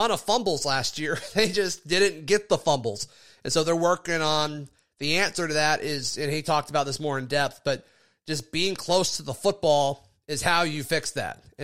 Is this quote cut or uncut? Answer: uncut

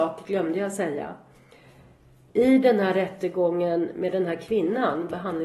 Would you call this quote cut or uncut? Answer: uncut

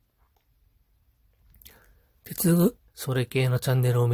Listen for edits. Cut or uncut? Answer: cut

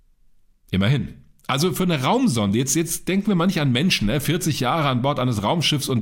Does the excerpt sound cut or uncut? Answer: uncut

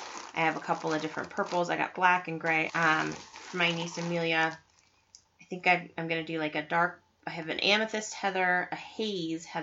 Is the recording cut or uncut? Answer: cut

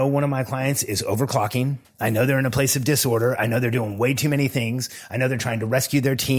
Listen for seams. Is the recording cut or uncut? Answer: cut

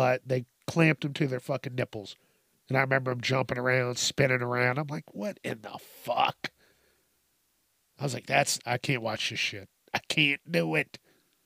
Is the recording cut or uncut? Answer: uncut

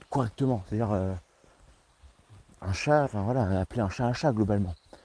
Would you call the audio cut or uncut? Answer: cut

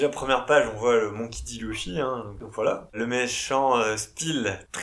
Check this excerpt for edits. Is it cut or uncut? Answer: uncut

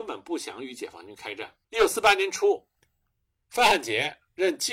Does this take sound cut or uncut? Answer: cut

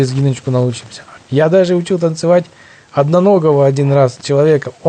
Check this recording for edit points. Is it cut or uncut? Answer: cut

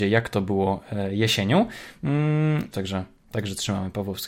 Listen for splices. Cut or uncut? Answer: cut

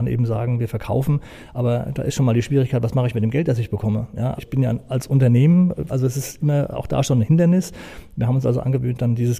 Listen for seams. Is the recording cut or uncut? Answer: cut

